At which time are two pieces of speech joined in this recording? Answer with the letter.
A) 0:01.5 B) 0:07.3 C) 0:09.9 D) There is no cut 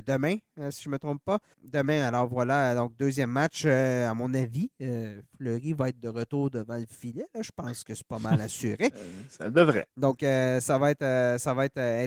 A